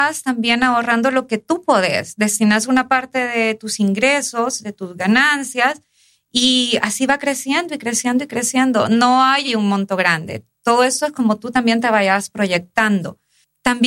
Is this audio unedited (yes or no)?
yes